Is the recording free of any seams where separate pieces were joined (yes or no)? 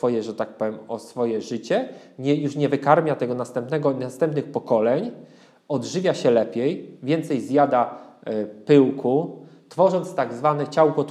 yes